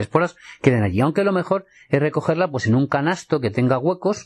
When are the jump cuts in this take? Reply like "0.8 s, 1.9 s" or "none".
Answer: none